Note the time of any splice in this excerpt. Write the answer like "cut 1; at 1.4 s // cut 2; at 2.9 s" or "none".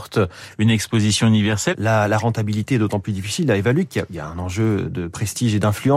cut 1; at 1.7 s